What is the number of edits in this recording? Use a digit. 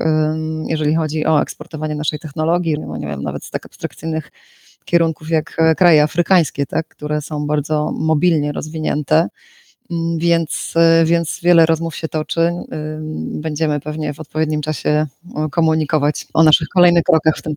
1